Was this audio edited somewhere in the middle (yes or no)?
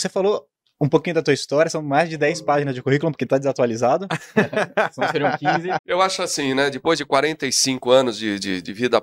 yes